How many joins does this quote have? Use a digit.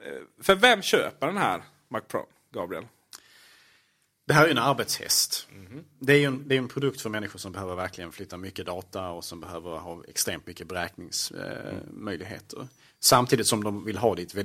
0